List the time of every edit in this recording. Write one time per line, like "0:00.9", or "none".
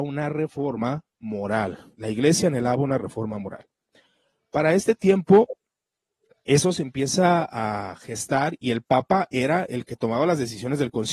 none